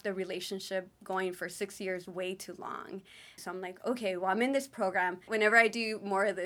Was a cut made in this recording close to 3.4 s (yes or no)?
yes